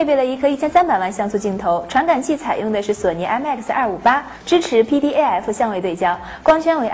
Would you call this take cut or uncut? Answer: uncut